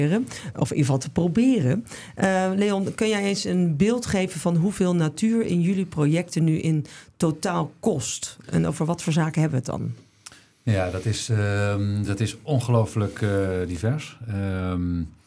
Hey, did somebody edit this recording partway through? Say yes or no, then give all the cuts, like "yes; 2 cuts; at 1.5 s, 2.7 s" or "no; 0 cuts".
no; 0 cuts